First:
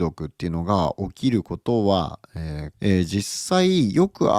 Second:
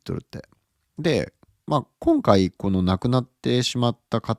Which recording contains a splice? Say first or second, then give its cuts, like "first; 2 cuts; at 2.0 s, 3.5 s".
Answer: first; 1 cut; at 2.7 s